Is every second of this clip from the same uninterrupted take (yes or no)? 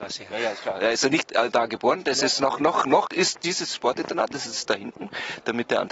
yes